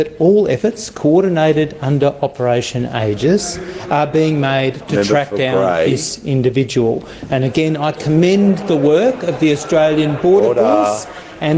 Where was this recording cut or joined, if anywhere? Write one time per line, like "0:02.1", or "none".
none